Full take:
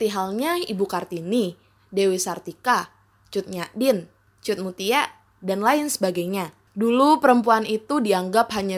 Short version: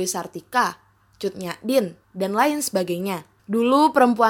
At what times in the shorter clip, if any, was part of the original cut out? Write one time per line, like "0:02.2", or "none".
0:02.0

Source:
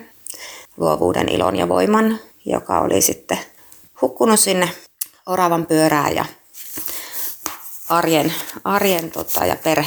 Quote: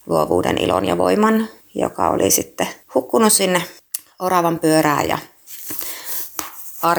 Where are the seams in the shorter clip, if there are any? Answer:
0:02.8

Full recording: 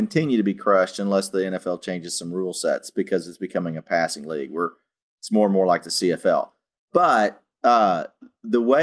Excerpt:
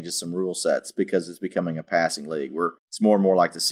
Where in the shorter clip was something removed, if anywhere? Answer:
0:02.8

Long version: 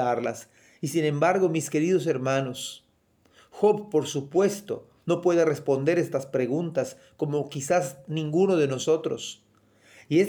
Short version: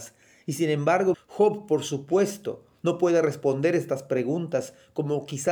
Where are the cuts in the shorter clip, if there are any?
0:01.1

